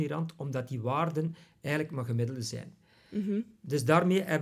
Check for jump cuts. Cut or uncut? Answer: uncut